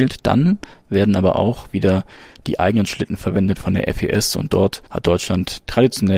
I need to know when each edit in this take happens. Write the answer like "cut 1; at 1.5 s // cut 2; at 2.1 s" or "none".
cut 1; at 4.9 s